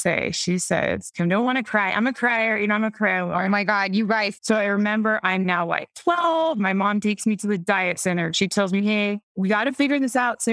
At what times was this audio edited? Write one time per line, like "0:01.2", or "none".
0:04.4